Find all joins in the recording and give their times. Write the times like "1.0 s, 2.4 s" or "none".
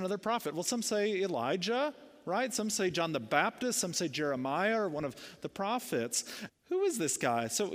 6.5 s